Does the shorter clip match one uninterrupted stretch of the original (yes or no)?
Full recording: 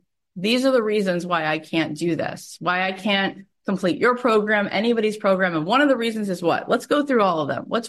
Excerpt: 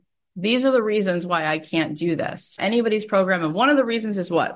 no